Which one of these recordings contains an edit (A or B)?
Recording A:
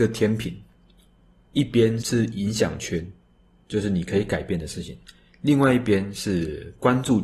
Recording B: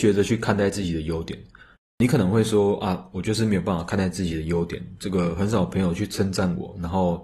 A